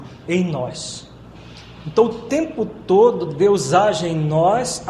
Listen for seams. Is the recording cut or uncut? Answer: uncut